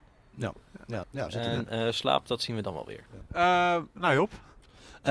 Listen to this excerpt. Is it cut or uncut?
cut